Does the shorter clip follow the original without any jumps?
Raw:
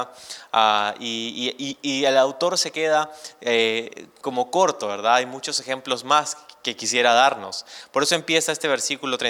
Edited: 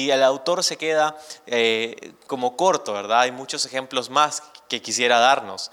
yes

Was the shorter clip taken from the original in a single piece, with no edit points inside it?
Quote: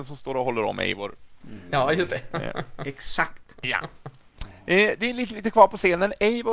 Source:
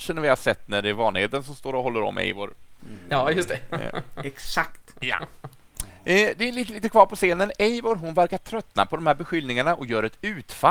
yes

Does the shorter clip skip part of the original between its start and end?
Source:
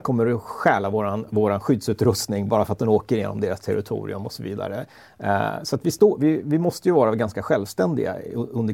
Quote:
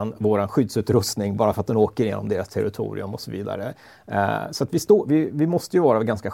no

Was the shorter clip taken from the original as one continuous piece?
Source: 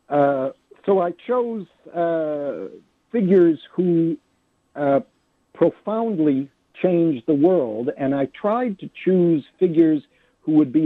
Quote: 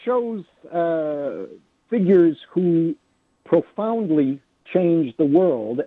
no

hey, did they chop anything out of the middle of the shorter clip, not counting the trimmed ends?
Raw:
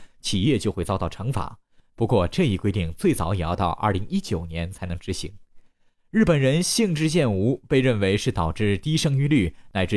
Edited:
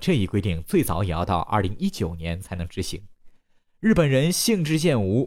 no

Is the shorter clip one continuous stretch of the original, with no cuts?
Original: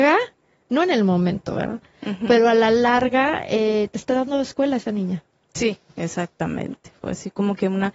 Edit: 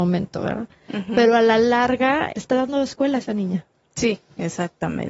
no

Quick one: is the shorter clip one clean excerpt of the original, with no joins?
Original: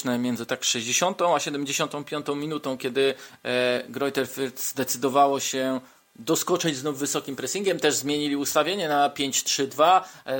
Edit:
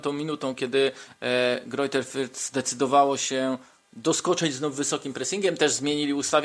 yes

